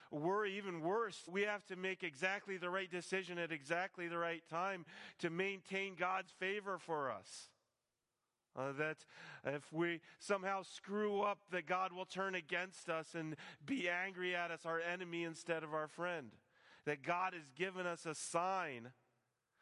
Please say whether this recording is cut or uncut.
cut